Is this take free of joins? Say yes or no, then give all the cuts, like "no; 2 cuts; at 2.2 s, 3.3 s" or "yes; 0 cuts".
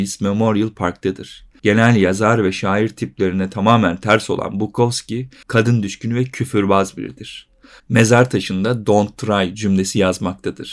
no; 2 cuts; at 5.4 s, 7.8 s